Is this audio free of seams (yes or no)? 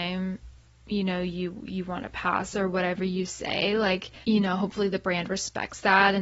no